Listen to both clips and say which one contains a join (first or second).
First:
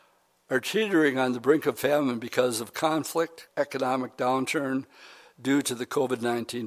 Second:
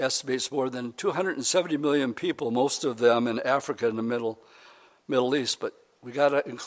first